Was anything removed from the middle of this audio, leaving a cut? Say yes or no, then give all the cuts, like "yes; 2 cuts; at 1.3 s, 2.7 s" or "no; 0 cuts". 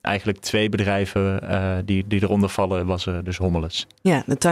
no; 0 cuts